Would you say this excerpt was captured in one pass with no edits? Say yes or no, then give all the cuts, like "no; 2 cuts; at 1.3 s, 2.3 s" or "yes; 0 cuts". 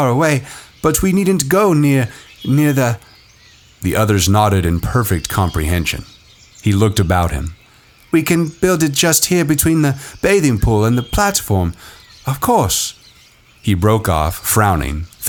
no; 1 cut; at 6.5 s